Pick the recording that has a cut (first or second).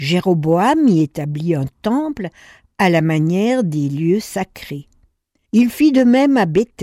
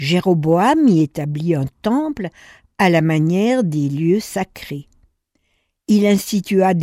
first